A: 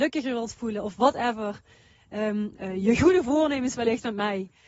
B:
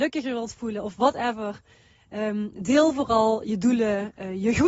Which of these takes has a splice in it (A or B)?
A